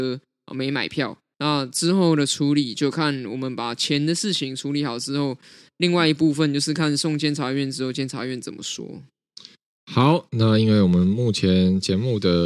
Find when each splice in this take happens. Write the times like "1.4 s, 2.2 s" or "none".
1.3 s

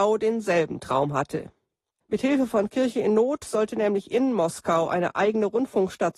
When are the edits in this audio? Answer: 2.0 s

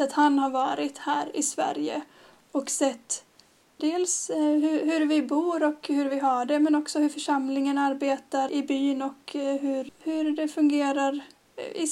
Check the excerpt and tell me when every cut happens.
3.8 s, 8.5 s, 9.9 s

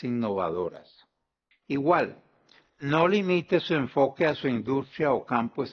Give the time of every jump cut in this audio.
1.5 s

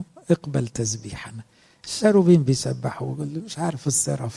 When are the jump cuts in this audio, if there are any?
none

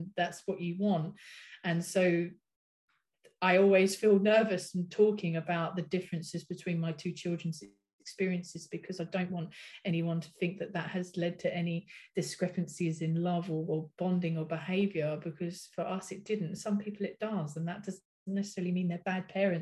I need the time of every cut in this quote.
none

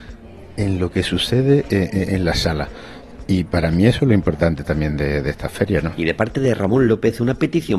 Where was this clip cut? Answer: none

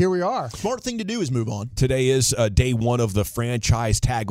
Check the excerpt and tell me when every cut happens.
none

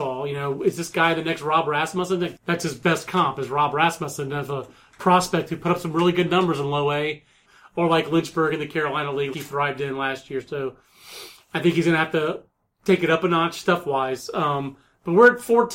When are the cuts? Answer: 2.4 s, 7.4 s, 9.3 s

